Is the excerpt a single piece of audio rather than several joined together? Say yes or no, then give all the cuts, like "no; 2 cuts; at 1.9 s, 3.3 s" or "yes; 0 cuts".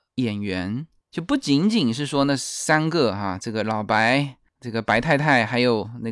yes; 0 cuts